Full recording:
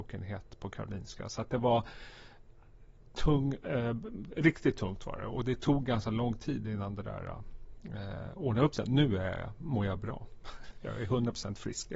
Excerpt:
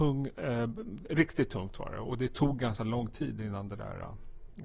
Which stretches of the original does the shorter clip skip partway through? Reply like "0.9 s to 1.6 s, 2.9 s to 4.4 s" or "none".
none